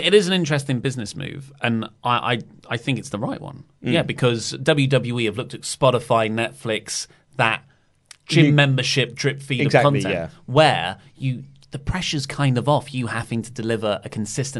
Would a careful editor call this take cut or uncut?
uncut